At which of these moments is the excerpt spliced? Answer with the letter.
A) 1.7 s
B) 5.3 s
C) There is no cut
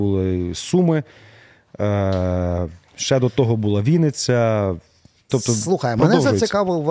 B